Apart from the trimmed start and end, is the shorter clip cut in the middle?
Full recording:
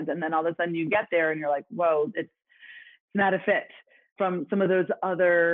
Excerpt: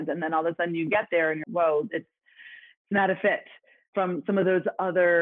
yes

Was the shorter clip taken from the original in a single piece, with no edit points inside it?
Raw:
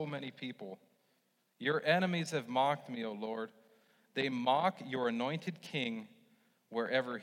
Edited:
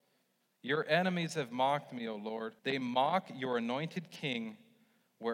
no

